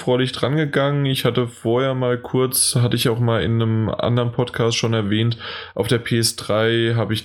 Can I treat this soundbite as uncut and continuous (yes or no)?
yes